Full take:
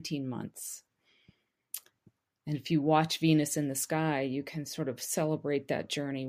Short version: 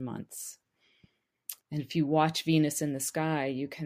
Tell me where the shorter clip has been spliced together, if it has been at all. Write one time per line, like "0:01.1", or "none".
0:01.6

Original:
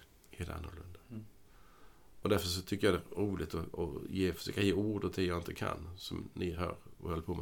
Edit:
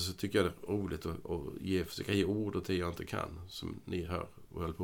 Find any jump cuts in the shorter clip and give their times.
none

